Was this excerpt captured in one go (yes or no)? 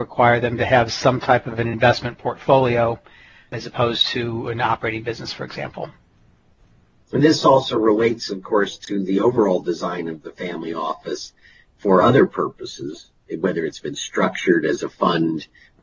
yes